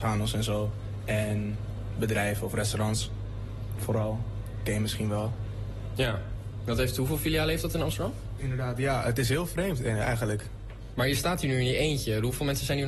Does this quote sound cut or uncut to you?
cut